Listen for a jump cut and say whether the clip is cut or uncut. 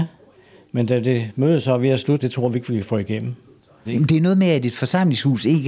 cut